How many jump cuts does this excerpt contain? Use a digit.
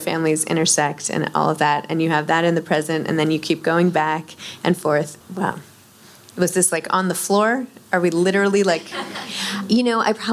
1